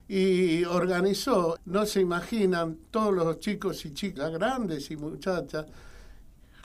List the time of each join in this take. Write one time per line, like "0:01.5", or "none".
0:01.6
0:04.2